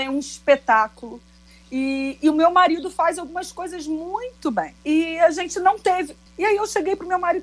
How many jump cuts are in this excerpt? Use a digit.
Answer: 2